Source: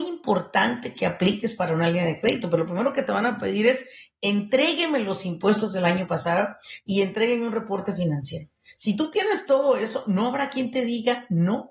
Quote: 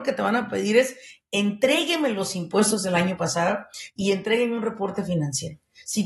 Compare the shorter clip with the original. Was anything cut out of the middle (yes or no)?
no